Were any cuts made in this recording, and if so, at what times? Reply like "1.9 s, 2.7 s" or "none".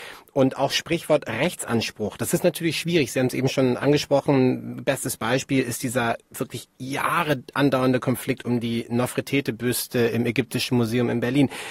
none